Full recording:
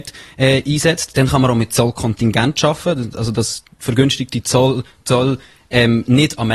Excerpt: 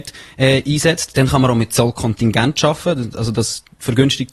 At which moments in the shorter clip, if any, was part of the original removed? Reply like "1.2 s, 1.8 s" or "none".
none